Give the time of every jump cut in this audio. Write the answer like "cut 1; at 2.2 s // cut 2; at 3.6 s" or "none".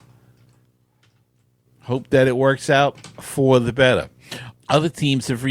cut 1; at 4.5 s